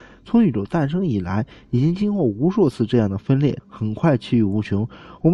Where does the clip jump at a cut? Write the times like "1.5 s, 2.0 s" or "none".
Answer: 3.6 s